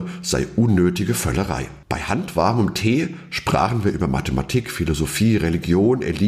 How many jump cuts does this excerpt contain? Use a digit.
1